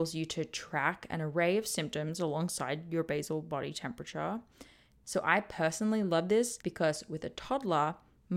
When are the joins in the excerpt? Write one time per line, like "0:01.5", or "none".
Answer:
0:05.0
0:06.6

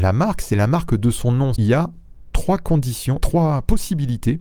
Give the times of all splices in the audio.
0:01.6
0:03.2

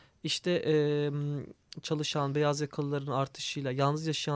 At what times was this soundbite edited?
0:01.8

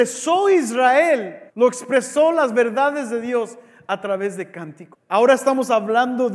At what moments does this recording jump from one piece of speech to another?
0:01.5
0:04.9

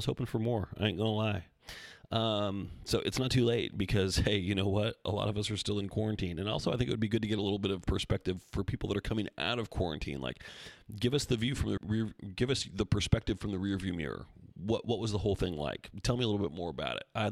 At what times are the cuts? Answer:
0:11.8

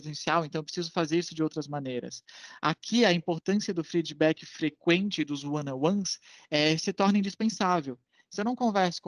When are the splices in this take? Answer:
none

